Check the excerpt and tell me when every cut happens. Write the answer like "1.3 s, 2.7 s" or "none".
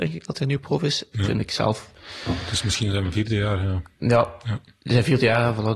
1.1 s